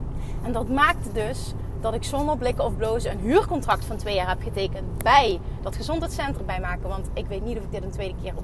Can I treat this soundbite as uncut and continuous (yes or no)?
no